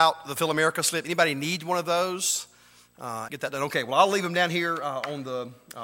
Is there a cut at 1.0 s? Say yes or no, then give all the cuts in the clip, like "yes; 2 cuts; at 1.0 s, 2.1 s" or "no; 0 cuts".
no; 1 cut; at 3.3 s